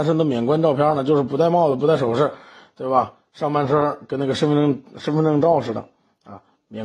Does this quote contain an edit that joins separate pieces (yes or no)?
no